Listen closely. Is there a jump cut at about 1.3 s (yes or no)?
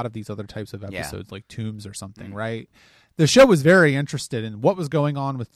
no